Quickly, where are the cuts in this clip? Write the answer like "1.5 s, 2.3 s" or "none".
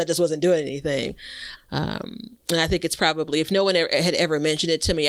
1.6 s